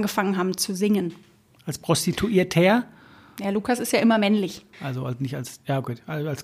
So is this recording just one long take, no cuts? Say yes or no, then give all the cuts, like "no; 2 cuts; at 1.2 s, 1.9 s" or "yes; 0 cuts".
no; 1 cut; at 4.7 s